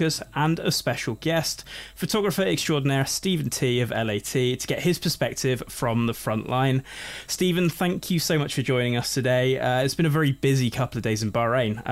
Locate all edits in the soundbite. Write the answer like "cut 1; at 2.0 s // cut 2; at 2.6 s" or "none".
none